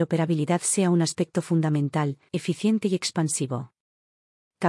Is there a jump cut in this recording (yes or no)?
yes